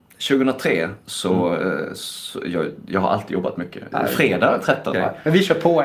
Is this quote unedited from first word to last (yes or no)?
no